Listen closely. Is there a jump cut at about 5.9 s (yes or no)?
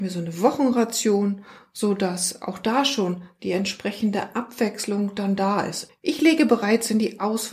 yes